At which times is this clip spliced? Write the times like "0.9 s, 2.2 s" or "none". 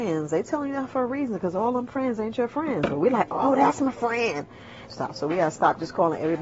4.9 s